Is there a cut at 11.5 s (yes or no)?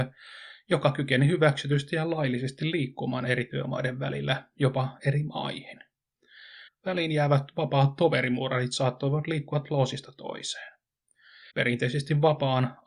yes